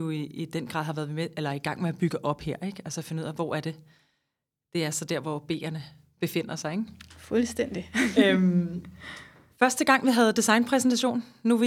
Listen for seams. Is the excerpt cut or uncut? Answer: uncut